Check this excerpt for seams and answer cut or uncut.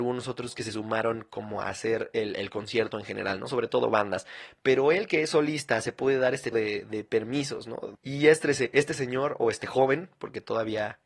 cut